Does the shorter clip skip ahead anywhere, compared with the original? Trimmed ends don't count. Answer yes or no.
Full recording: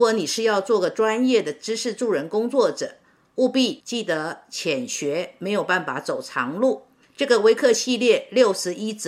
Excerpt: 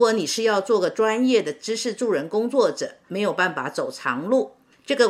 yes